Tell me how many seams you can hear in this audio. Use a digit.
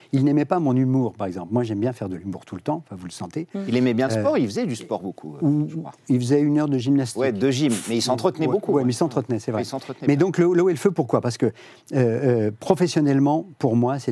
0